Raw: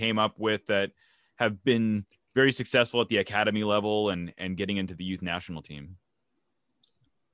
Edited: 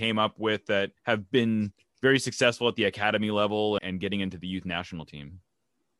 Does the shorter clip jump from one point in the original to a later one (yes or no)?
yes